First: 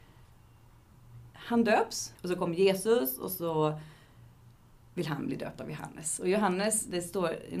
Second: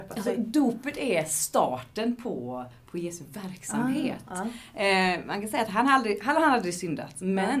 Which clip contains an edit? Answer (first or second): first